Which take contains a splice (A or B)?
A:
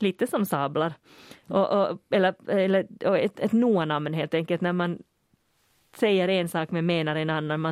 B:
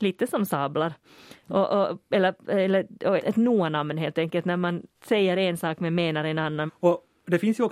B